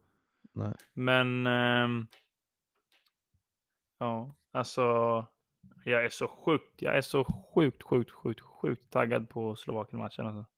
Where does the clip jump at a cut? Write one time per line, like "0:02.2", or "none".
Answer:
none